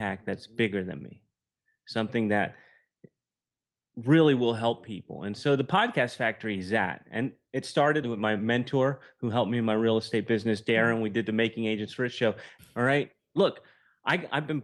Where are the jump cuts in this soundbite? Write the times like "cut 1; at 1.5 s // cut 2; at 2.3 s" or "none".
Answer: cut 1; at 8.0 s // cut 2; at 12.6 s

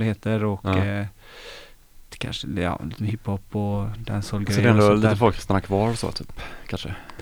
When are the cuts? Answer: none

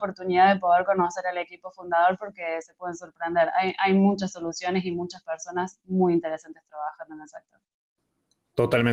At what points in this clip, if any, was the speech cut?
none

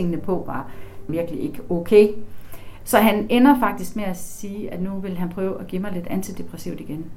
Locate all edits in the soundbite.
cut 1; at 1.1 s // cut 2; at 2.8 s

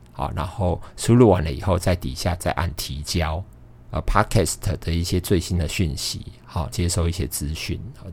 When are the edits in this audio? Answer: cut 1; at 3.9 s // cut 2; at 6.7 s

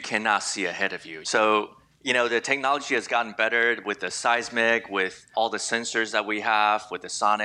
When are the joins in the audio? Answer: cut 1; at 1.2 s // cut 2; at 5.3 s

